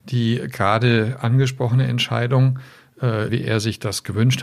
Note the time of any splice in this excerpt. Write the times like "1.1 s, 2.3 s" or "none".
3.3 s